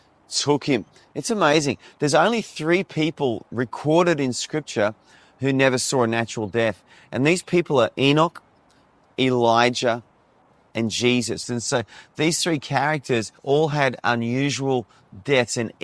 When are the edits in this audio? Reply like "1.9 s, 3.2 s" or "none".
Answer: 11.4 s, 13.4 s